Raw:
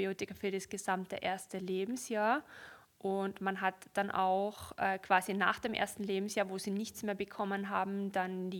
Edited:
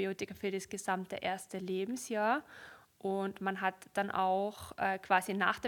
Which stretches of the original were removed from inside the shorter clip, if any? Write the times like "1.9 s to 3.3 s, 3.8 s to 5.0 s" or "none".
none